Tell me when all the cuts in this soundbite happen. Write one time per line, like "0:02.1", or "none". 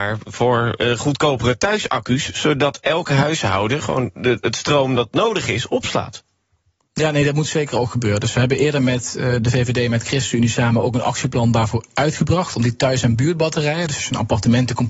none